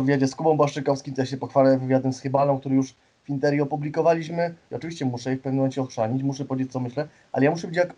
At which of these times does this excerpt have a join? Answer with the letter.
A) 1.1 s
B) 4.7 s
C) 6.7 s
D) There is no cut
B